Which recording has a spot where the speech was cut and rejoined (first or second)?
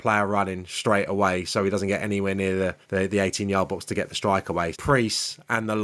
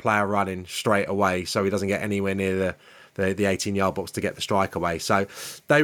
first